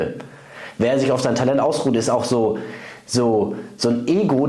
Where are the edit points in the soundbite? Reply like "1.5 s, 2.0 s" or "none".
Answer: none

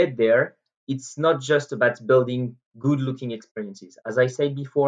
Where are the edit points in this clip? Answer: none

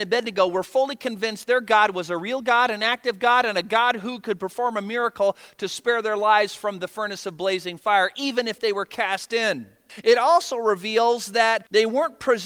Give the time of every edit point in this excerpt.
none

